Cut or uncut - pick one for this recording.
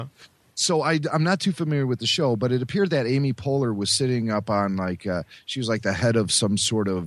uncut